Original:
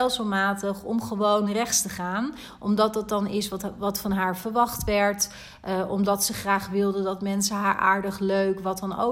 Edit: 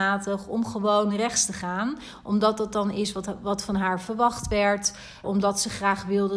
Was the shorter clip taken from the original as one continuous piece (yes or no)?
no